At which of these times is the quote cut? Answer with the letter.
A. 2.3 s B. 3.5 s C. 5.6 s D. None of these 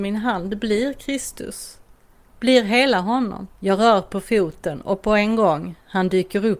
B